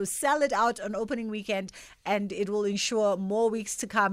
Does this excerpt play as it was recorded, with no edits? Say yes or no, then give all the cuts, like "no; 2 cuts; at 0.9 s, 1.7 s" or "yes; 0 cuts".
yes; 0 cuts